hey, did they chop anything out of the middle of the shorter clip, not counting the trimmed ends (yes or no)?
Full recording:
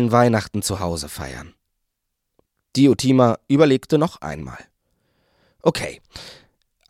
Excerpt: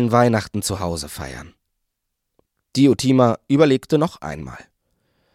no